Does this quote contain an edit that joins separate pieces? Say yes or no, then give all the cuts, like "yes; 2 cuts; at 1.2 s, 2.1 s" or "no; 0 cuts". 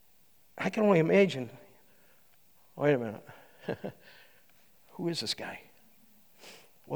no; 0 cuts